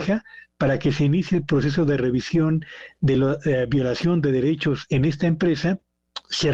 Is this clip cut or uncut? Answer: uncut